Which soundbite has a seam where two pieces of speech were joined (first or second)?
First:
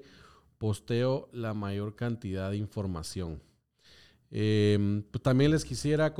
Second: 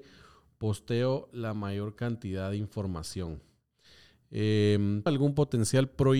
second